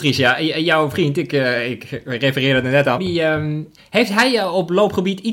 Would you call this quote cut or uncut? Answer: cut